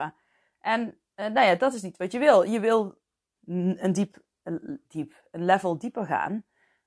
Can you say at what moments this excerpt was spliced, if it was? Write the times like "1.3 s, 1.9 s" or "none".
3.4 s